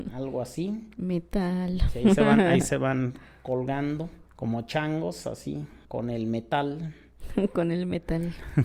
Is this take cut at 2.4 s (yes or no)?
no